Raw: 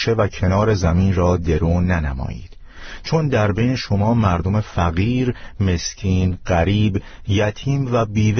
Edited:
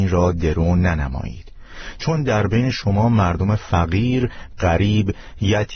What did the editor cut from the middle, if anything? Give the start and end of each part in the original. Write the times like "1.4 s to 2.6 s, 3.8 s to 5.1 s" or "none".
5.6 s to 6.4 s